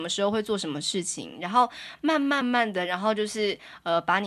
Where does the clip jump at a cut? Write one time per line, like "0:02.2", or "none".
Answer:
0:02.4